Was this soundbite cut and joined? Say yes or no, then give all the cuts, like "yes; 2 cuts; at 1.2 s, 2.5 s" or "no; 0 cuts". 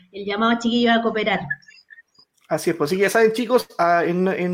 no; 0 cuts